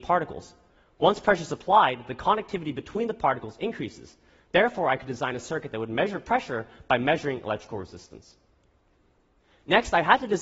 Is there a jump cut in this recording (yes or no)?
no